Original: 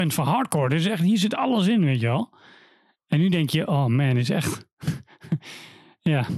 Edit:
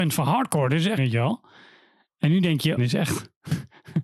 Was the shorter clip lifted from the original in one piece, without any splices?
no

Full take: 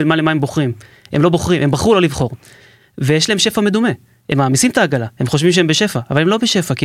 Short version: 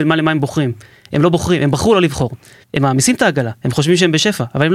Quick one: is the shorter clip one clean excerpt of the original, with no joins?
no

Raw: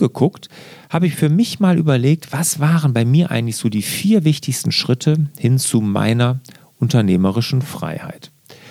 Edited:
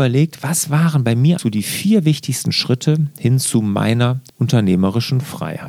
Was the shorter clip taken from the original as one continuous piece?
no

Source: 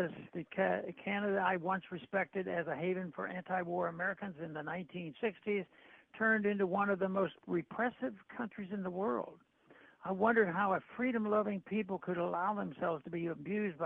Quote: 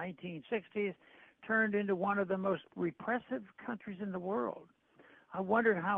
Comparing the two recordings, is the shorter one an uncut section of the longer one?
yes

